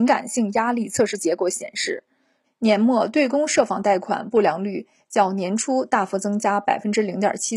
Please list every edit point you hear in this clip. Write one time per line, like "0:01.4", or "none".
0:02.4